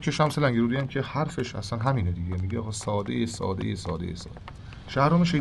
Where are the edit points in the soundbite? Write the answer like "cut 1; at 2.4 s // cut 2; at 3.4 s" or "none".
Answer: none